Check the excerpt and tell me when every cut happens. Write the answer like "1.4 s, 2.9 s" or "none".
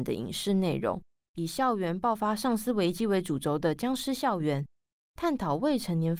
1.3 s